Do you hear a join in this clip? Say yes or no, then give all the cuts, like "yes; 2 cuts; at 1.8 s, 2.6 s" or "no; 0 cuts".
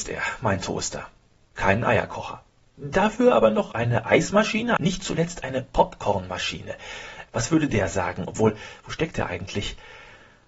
yes; 3 cuts; at 1.4 s, 4.8 s, 7.3 s